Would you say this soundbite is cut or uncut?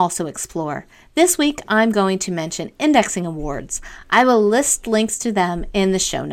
uncut